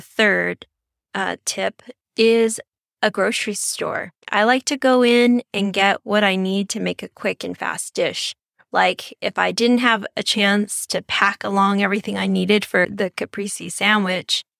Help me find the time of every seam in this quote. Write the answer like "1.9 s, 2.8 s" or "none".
4.2 s